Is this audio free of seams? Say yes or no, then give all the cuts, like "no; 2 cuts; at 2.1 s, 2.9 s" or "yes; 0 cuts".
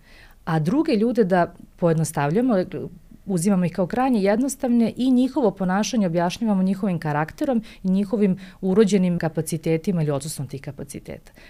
no; 1 cut; at 9.2 s